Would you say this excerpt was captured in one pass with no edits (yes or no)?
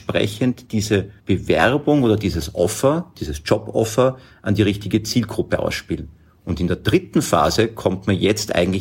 no